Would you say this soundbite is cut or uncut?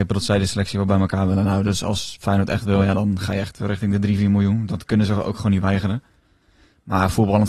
uncut